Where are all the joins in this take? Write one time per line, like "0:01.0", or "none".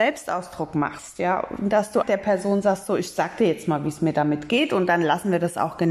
0:02.0